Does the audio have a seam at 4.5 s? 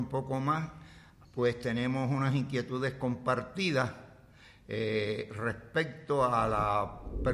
no; 1 cut; at 1.2 s

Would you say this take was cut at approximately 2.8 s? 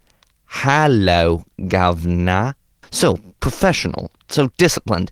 yes; 1 cut; at 2.8 s

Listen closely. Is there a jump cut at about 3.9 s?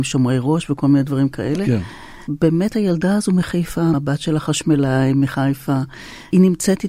yes; 1 cut; at 3.9 s

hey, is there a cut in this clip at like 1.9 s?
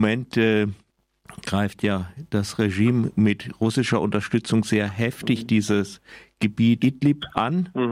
no; 1 cut; at 6.8 s

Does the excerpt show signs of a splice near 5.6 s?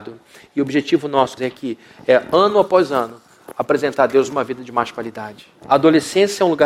yes; 2 cuts; at 1.4 s, 5.6 s

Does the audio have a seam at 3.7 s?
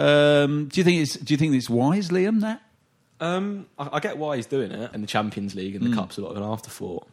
no; 1 cut; at 4.9 s

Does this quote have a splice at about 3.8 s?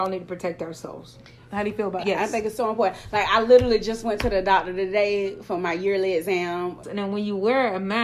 no; 2 cuts; at 2.0 s, 6.8 s

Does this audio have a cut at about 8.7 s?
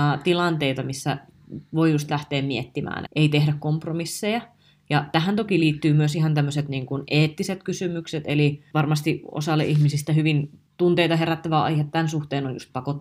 yes; 3 cuts; at 3.1 s, 8.7 s, 10.7 s

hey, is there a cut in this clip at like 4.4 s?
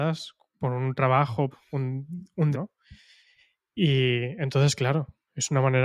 no; 2 cuts; at 1.5 s, 2.5 s

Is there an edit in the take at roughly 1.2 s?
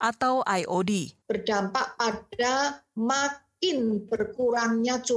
yes; 1 cut; at 1.2 s

